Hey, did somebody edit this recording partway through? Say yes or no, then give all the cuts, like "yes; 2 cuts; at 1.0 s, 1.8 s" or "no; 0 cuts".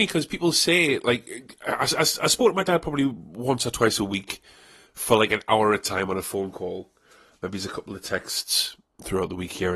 no; 0 cuts